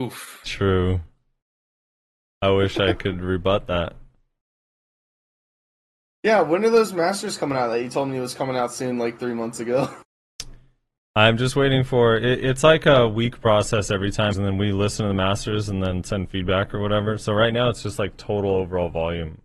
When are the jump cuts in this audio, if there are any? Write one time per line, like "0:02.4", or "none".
0:14.3